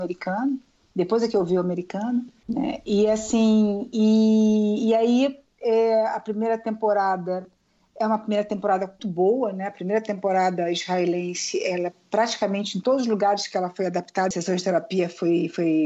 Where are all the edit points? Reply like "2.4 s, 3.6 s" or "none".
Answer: 2.4 s, 9.0 s, 14.3 s